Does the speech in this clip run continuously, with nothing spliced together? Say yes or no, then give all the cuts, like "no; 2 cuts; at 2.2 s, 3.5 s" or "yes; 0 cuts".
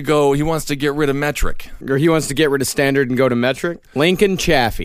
no; 2 cuts; at 1.8 s, 3.9 s